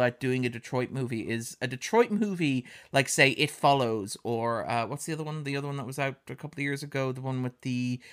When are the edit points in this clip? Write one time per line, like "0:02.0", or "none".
none